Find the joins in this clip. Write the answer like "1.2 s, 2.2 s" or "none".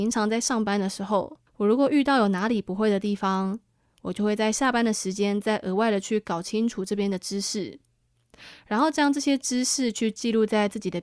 1.5 s